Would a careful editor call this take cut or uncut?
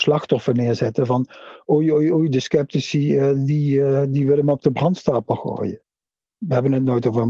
uncut